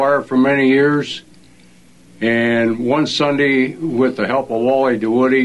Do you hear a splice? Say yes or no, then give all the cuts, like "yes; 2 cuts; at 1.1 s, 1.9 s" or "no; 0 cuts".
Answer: no; 0 cuts